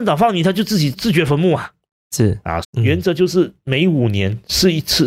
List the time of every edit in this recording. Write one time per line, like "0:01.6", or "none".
0:00.9
0:02.6